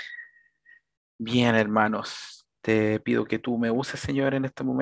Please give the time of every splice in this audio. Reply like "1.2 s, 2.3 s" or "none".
2.6 s